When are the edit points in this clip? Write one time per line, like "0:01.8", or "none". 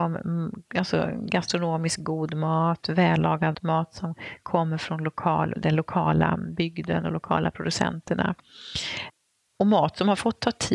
0:03.5